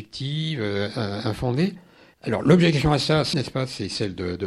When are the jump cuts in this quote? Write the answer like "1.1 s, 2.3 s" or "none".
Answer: 2.1 s, 3.3 s